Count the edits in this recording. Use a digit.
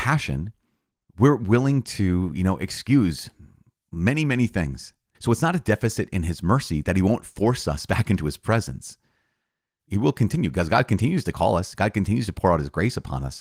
2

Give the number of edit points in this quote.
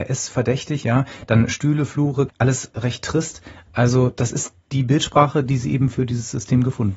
1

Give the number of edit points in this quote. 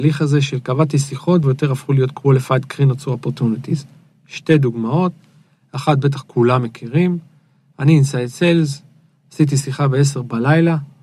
1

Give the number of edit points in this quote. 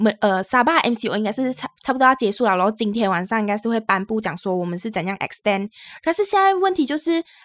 0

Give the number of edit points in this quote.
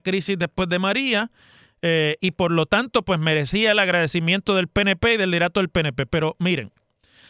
0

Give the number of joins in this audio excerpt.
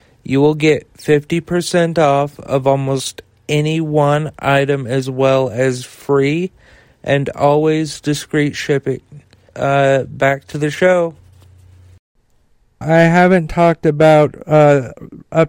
2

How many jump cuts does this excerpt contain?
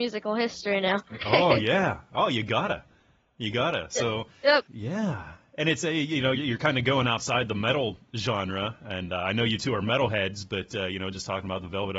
2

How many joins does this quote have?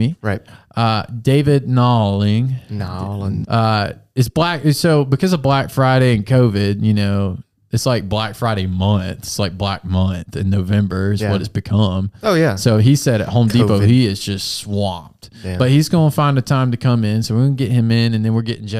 1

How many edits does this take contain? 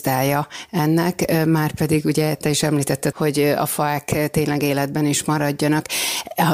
1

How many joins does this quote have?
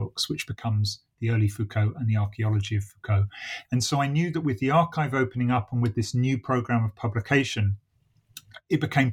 1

